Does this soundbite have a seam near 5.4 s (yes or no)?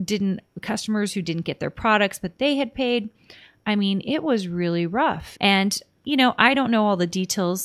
yes